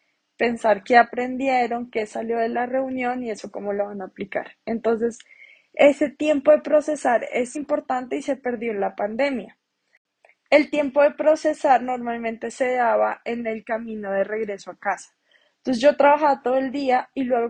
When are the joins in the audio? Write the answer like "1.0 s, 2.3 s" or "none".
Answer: 7.5 s